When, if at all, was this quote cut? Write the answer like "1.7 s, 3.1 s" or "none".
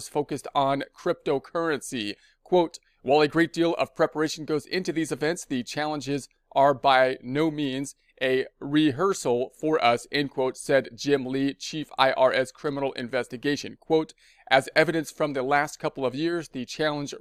none